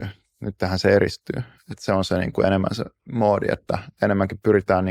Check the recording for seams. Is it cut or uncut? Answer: uncut